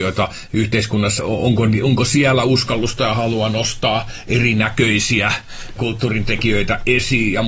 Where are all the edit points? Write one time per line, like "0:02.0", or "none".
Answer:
0:01.2
0:05.8